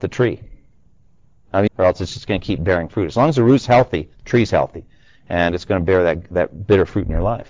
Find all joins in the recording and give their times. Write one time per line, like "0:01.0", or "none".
0:01.7